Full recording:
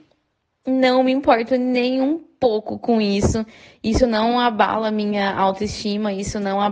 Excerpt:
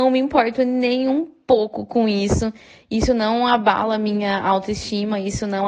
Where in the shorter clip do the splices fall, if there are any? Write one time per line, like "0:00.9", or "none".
none